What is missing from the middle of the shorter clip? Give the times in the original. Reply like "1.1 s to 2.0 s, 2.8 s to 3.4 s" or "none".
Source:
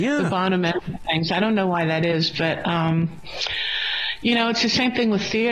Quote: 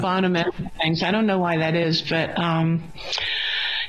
none